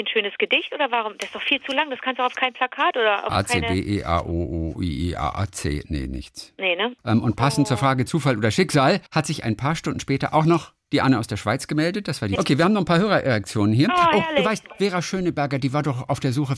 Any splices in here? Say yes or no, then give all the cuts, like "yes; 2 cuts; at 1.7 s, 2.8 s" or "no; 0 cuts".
yes; 3 cuts; at 7.0 s, 9.1 s, 12.4 s